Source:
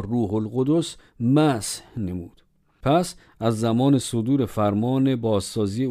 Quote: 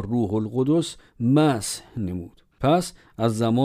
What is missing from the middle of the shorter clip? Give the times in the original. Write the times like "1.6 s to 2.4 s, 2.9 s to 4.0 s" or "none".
2.5 s to 2.7 s

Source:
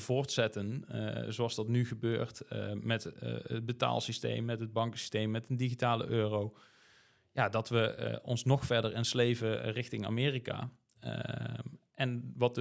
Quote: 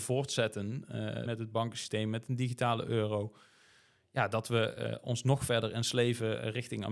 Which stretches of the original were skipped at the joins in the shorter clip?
1.3 s to 4.5 s

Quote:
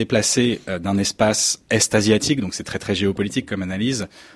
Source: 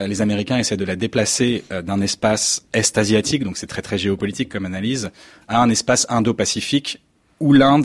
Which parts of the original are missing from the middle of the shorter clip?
none

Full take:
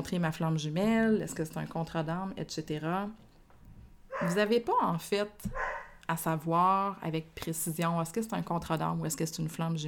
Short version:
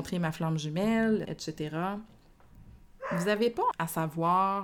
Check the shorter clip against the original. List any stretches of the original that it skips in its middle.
1.2 s to 2.3 s, 4.8 s to 6.0 s

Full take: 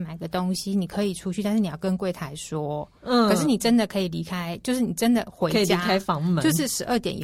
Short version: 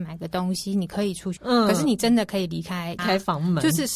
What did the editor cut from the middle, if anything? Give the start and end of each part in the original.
1.4 s to 3.0 s, 4.6 s to 5.8 s

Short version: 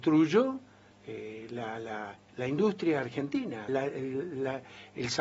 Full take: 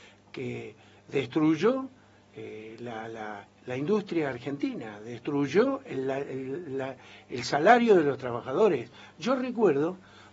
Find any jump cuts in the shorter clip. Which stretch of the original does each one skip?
5.0 s to 6.0 s

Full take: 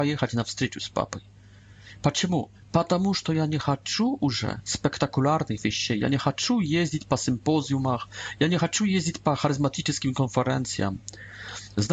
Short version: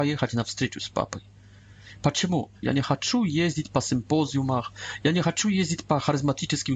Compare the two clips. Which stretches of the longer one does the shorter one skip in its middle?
2.6 s to 6.0 s

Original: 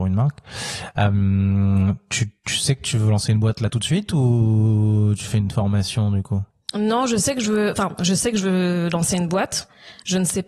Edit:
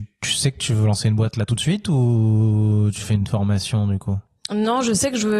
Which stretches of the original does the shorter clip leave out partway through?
none

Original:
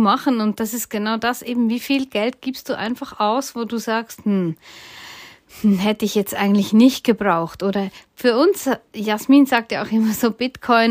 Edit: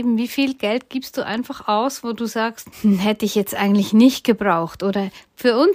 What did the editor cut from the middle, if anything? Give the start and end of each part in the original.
4.2 s to 5.5 s

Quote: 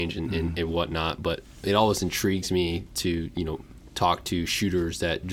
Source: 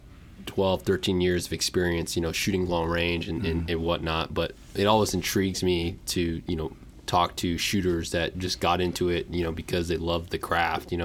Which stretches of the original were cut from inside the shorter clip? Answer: none

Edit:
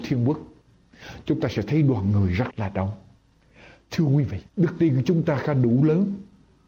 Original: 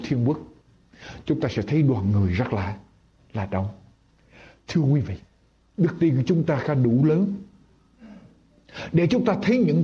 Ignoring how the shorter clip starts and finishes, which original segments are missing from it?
2.5 s to 3.3 s, 5.2 s to 5.7 s

